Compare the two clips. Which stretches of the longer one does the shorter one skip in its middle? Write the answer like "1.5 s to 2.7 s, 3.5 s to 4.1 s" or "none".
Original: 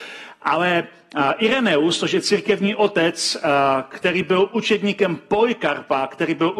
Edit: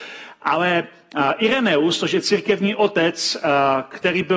none